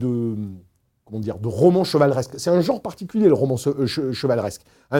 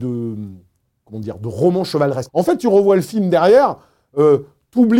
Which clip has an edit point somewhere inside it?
second; 1 cut; at 2.3 s

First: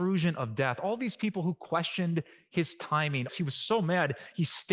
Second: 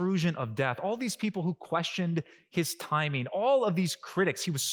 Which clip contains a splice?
first; 1 cut; at 3.3 s

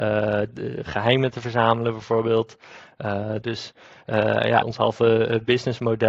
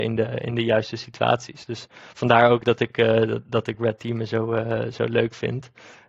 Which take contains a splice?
first; 2 cuts; at 3.4 s, 4.6 s

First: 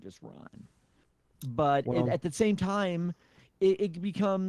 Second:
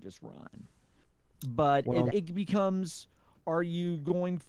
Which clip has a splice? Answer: second; 1 cut; at 2.1 s

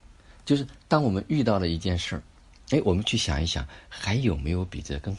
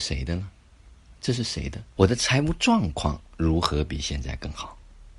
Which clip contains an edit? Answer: second; 1 cut; at 2.0 s

